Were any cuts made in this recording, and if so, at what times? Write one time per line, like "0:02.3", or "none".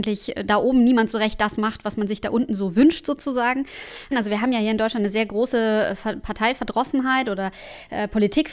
0:04.1

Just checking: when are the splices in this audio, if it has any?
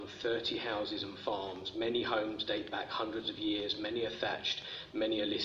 none

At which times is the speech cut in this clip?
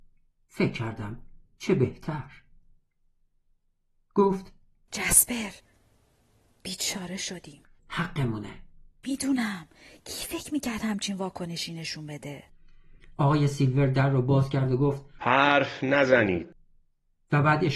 none

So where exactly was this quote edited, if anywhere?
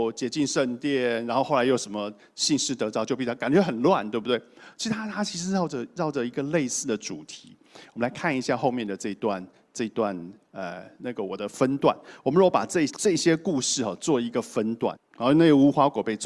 0:12.9
0:15.0

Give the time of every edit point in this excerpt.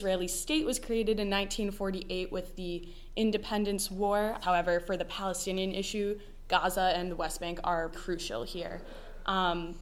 0:04.4
0:07.9

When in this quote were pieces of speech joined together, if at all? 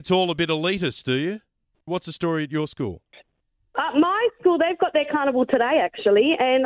0:01.9

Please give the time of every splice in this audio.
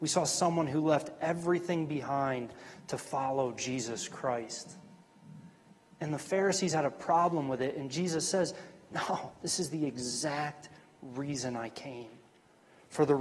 none

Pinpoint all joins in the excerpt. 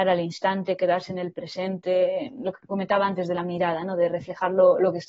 none

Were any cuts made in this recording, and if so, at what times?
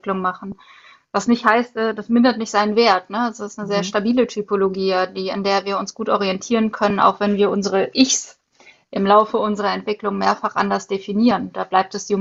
none

